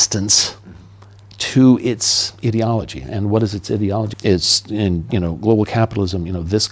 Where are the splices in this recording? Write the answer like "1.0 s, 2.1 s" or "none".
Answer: 4.1 s